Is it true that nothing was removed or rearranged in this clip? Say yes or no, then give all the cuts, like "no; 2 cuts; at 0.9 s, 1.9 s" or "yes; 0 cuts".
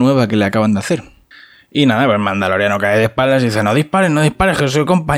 yes; 0 cuts